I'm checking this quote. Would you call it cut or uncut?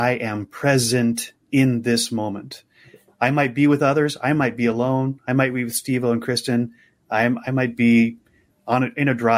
uncut